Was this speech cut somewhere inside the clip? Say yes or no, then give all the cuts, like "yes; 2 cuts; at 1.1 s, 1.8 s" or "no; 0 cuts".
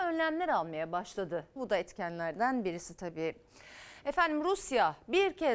yes; 1 cut; at 1.6 s